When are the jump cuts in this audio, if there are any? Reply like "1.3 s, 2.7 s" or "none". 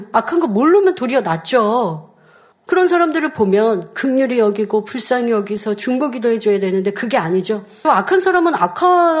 2.5 s, 7.8 s